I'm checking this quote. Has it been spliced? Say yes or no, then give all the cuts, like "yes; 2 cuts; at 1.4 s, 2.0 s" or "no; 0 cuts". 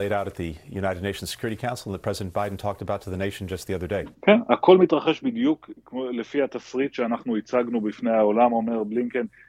yes; 1 cut; at 4.1 s